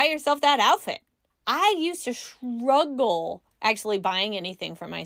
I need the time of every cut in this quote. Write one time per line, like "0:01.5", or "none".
0:01.3